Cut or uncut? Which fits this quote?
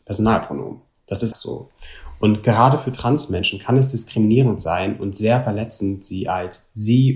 cut